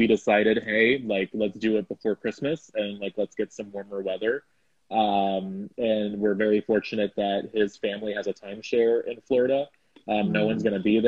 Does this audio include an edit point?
no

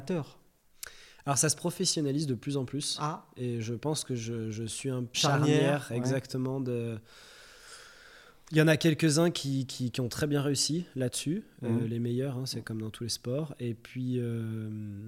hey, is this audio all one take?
no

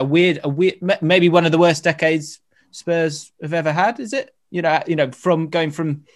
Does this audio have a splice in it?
no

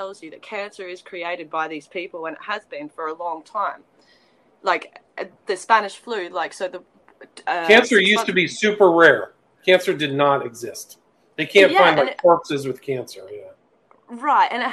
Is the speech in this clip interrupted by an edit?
no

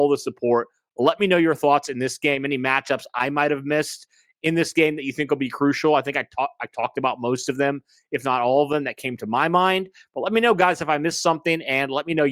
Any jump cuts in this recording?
no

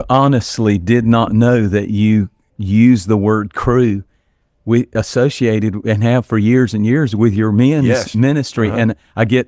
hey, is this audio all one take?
yes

